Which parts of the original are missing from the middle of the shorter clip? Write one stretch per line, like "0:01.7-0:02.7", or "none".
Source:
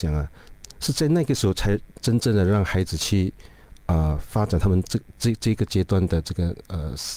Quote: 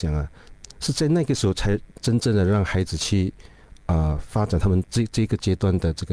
0:04.8-0:05.1